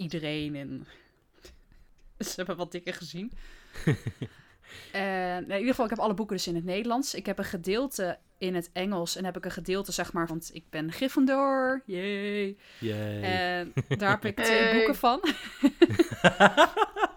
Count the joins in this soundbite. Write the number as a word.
one